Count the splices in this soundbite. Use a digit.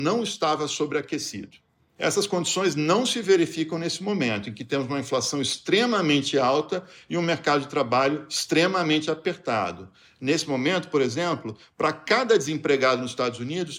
0